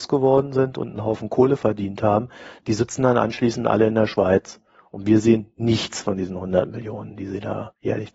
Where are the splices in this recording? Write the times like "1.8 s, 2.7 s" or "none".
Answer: none